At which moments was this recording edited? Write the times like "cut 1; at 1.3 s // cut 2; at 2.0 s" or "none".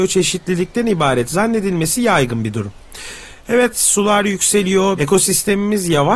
cut 1; at 5.0 s